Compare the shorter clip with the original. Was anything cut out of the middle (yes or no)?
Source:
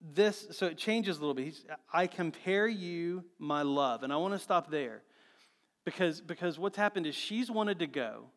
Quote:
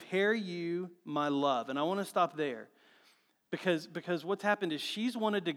no